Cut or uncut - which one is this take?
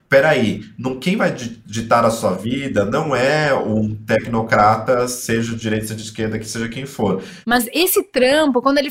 cut